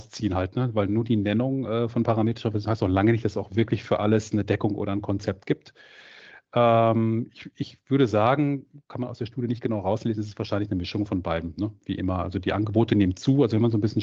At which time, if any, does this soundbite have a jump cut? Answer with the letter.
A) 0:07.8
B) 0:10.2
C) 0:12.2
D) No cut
D